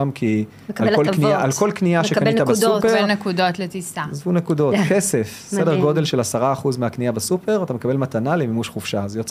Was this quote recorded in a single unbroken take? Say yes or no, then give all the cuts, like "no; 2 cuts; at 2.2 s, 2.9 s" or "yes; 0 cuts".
yes; 0 cuts